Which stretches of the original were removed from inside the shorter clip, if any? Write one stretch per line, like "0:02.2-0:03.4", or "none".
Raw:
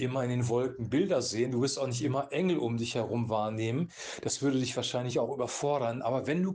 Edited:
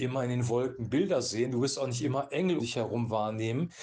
0:02.6-0:02.8